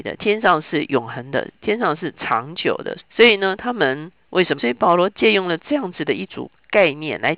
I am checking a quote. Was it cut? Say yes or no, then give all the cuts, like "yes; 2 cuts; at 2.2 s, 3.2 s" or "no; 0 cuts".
yes; 2 cuts; at 3.0 s, 4.6 s